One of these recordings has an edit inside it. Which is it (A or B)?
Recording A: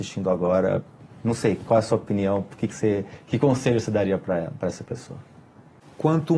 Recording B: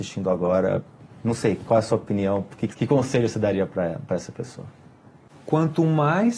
B